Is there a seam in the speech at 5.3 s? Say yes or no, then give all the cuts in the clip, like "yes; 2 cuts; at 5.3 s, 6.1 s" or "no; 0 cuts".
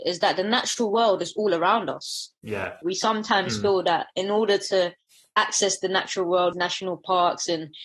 no; 2 cuts; at 2.8 s, 6.5 s